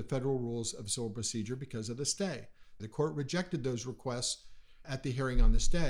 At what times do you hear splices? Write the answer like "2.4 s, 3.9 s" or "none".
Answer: 2.8 s, 4.8 s